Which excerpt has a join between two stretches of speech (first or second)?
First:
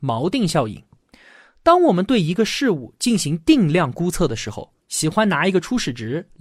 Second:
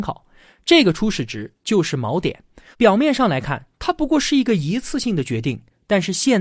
second